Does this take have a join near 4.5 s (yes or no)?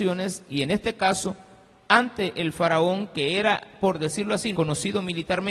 yes